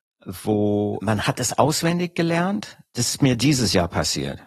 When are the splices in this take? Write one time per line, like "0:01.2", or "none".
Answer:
none